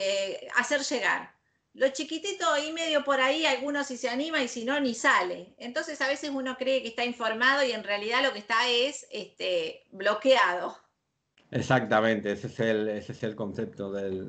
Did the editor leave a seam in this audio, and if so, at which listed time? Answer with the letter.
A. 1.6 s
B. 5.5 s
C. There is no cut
C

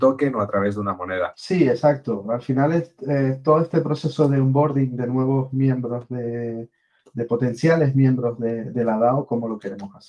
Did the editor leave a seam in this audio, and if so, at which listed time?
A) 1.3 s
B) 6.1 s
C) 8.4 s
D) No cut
A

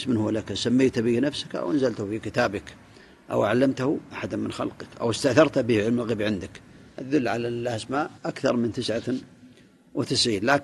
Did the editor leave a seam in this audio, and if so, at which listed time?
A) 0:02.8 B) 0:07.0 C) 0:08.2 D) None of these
C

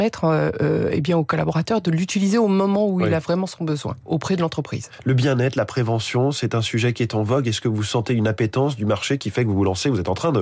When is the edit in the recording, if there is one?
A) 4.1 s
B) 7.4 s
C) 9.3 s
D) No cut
A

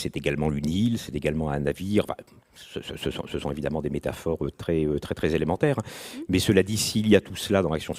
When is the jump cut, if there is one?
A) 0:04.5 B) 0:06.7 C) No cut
A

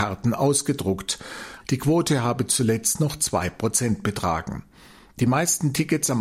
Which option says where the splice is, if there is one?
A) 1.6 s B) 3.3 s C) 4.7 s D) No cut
A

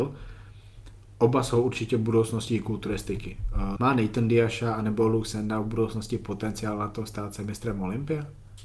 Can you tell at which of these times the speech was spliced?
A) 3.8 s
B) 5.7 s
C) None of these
A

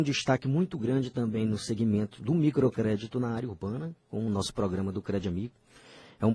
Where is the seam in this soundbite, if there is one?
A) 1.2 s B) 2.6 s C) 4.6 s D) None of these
D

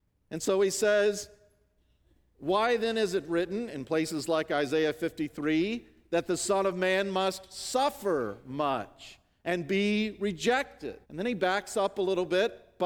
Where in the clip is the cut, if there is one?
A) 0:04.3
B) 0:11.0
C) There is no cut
B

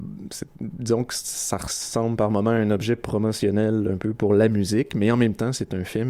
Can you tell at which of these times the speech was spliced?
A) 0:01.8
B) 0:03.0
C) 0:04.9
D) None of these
D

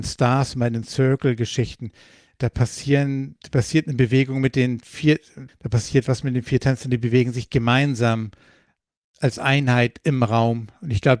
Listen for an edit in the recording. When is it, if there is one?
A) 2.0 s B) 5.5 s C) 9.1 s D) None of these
B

